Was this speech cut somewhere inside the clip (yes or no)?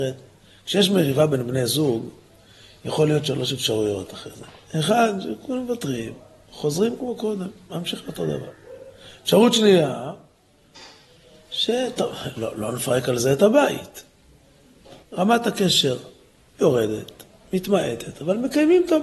yes